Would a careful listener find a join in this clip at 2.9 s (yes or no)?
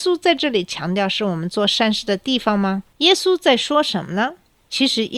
yes